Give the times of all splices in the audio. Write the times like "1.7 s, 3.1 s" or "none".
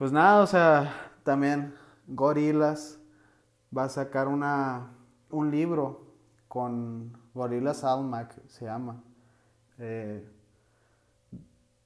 5.3 s, 9.7 s